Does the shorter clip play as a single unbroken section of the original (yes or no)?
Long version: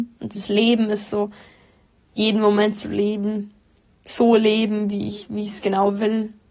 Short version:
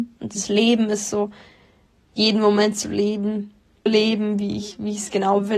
no